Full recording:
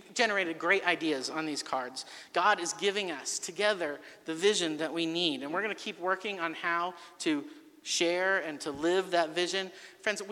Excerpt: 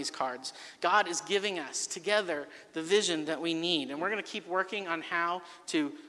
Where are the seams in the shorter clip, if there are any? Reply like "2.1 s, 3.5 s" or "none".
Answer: none